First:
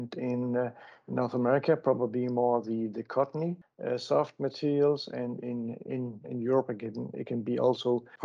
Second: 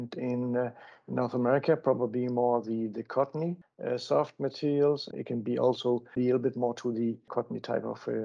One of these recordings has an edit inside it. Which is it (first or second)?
second